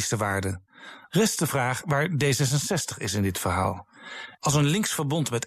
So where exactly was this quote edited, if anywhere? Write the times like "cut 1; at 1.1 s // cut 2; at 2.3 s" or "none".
cut 1; at 1.1 s // cut 2; at 4.4 s